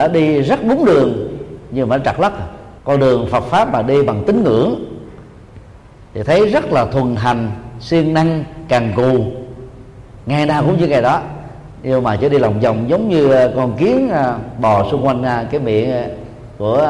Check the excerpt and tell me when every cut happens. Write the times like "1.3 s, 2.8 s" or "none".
2.8 s